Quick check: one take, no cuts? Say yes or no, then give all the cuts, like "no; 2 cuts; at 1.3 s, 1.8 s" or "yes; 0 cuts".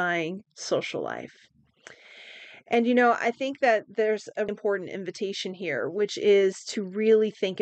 no; 1 cut; at 4.5 s